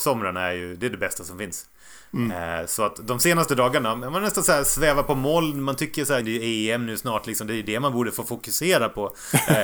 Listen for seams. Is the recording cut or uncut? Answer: cut